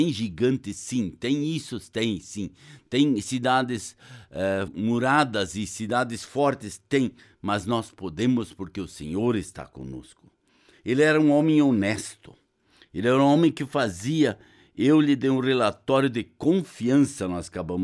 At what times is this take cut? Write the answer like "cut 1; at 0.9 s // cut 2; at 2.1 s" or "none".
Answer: cut 1; at 4.7 s